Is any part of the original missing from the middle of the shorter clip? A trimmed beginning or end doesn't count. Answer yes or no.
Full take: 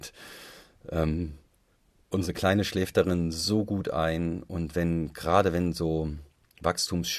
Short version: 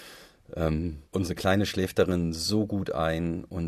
yes